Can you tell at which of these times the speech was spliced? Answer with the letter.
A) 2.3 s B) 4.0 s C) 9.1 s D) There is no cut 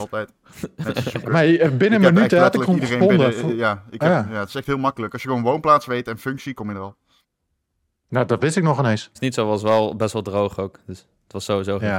C